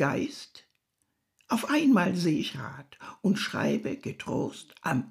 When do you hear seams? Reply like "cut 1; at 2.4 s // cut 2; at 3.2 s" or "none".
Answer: none